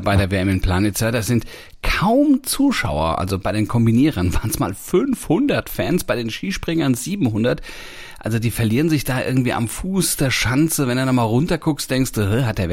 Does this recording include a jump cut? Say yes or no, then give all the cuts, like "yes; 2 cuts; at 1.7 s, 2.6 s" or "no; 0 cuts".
no; 0 cuts